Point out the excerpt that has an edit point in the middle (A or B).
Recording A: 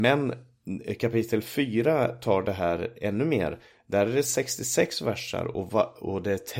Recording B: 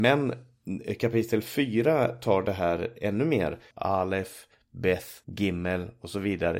B